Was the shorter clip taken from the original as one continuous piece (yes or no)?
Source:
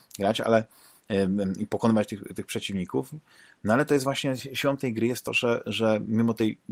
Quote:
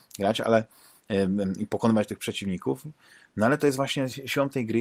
no